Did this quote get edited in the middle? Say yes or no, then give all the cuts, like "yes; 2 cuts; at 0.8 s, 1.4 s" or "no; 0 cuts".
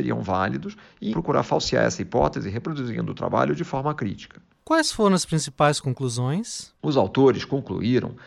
yes; 1 cut; at 1.1 s